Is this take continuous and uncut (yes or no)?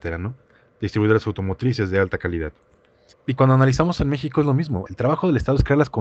no